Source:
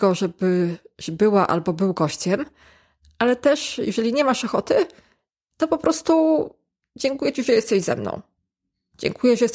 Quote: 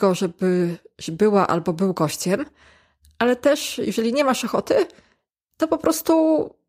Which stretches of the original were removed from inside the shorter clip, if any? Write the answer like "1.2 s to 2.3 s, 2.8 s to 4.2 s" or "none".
none